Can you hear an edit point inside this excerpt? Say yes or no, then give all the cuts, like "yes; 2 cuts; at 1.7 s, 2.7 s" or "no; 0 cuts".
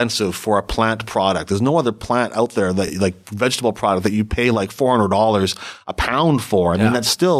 no; 0 cuts